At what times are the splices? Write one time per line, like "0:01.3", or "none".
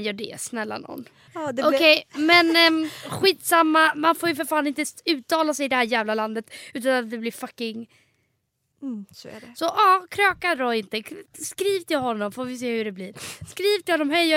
0:01.3
0:08.7